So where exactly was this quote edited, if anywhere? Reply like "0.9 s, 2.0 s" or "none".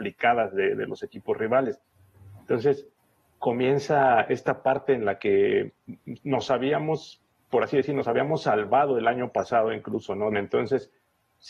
10.3 s